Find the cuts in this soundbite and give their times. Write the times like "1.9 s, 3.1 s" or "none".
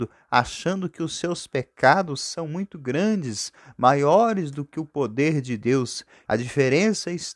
6.3 s